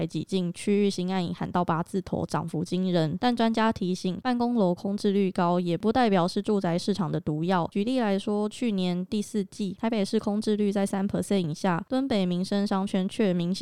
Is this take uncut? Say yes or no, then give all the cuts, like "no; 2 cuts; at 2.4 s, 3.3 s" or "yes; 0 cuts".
yes; 0 cuts